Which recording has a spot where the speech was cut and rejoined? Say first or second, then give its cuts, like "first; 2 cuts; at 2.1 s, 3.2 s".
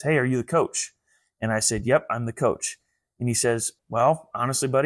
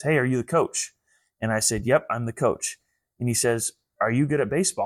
first; 1 cut; at 3.8 s